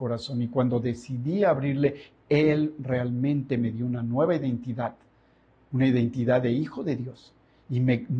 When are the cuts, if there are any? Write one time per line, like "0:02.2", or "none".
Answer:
none